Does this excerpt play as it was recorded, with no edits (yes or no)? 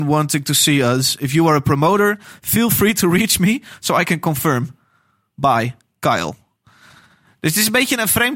yes